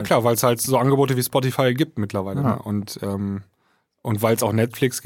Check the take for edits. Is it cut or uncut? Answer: uncut